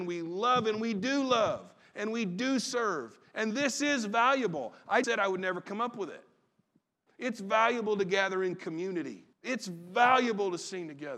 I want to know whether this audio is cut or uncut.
cut